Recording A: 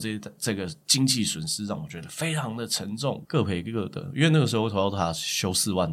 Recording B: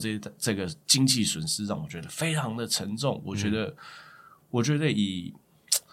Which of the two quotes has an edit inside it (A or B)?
A